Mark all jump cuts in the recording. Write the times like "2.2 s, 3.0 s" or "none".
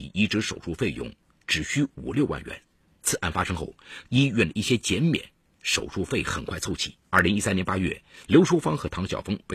4.1 s, 7.0 s, 8.3 s